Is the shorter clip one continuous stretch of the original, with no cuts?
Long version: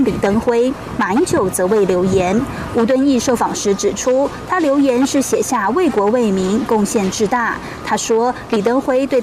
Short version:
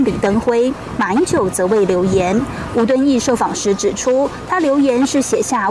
yes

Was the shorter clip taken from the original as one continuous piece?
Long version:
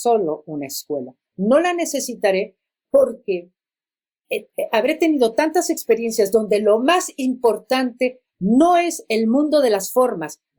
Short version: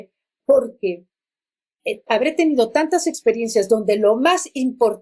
no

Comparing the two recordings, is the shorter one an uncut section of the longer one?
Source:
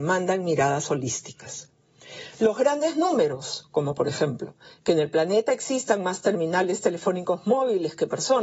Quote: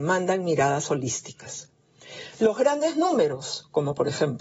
yes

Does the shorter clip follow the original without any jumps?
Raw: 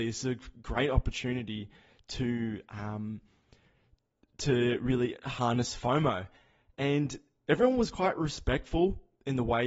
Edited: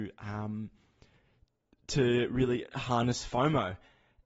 yes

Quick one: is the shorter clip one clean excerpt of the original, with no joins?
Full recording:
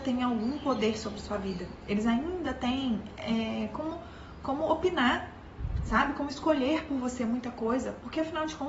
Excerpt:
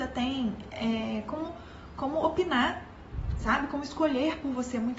yes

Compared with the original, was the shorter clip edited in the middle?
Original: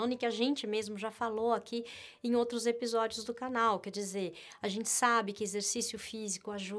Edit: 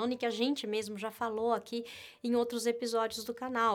no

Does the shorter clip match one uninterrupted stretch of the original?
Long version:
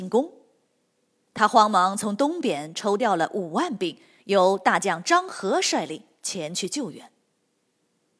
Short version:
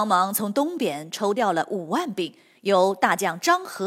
yes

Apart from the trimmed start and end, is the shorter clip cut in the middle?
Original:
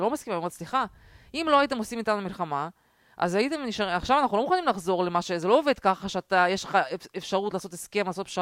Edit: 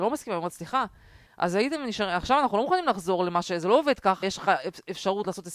yes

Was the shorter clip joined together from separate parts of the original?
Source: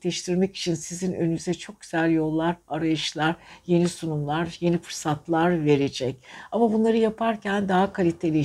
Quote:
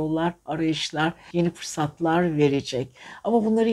yes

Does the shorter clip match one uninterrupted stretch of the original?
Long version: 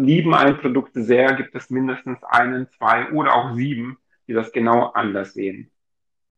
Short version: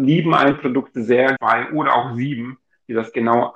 no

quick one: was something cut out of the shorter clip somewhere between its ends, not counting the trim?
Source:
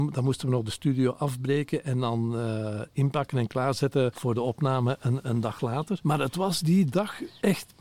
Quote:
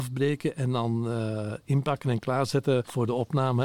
no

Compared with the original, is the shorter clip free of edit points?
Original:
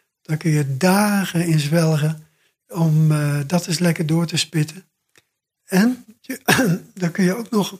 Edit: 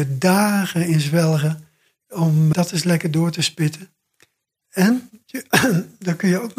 no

